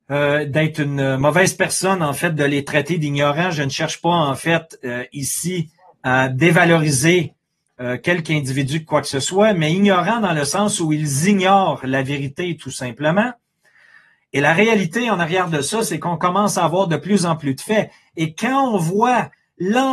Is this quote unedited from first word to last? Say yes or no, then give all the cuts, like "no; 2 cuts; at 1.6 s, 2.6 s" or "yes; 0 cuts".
yes; 0 cuts